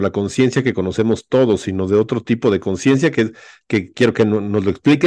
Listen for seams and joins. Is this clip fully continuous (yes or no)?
yes